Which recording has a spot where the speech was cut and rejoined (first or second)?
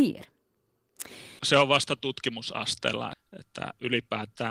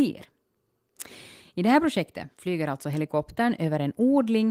first